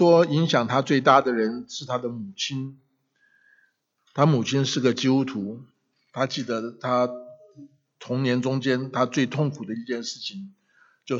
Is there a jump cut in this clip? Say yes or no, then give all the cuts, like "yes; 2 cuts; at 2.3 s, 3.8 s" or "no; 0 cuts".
no; 0 cuts